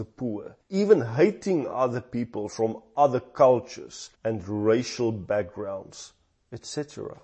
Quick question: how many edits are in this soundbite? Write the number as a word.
one